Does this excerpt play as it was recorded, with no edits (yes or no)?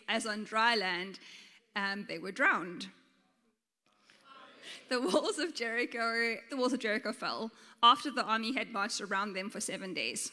no